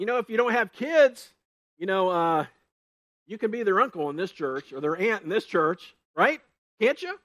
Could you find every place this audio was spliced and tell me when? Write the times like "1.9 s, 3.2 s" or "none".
none